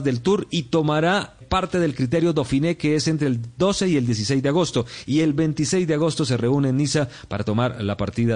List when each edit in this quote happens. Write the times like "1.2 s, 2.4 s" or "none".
1.4 s